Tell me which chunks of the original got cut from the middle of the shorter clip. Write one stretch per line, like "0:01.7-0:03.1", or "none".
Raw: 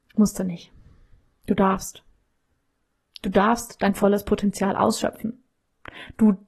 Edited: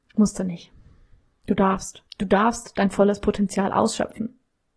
0:02.1-0:03.1